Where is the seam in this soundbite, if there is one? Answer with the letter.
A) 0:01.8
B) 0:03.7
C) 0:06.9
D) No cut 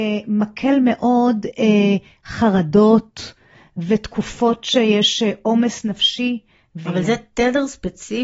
C